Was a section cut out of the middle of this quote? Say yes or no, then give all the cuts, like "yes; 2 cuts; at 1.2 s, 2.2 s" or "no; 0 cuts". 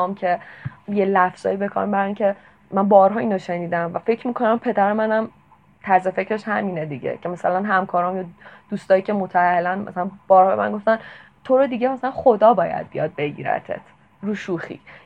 no; 0 cuts